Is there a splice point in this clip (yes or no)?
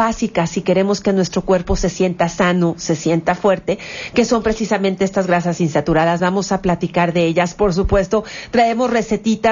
no